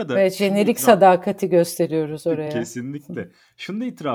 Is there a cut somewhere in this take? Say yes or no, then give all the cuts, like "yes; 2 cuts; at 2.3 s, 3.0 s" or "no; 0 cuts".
no; 0 cuts